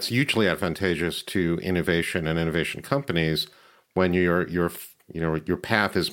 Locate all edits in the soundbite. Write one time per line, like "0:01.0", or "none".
none